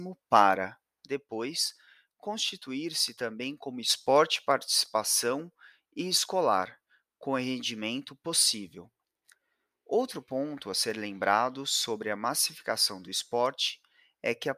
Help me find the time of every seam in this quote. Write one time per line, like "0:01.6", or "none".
none